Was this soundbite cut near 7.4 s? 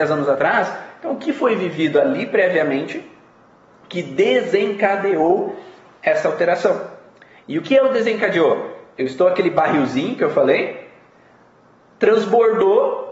yes; 1 cut; at 7.4 s

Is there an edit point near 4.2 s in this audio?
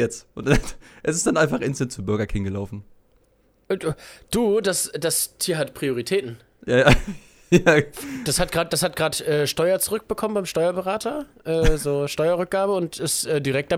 no; 0 cuts

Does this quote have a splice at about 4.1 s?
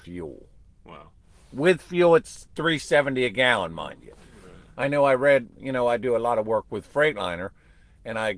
no; 0 cuts

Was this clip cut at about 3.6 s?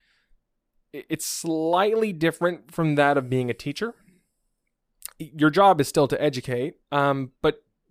no; 1 cut; at 6.8 s

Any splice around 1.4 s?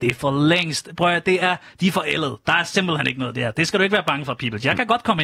no; 0 cuts

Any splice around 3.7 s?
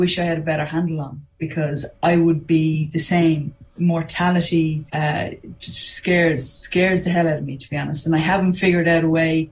no; 1 cut; at 4.9 s

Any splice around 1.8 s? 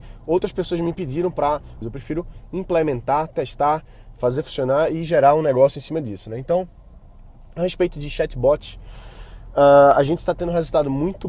yes; 1 cut; at 1.8 s

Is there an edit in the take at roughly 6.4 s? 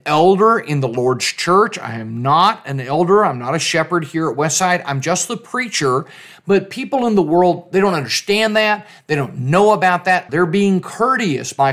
no; 1 cut; at 10.3 s

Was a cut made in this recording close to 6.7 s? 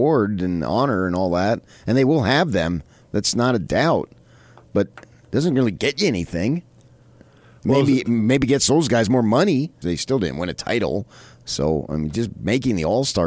no; 1 cut; at 9.8 s

